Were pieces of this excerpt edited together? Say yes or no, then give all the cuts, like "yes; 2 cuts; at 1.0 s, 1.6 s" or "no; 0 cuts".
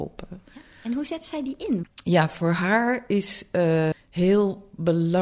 yes; 2 cuts; at 1.8 s, 3.9 s